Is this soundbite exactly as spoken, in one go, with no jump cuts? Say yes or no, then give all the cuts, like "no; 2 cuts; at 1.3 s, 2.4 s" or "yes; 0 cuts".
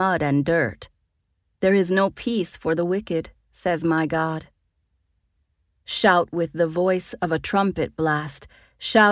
yes; 0 cuts